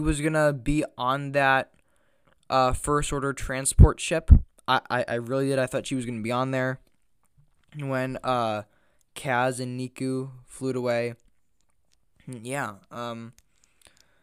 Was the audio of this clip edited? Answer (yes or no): no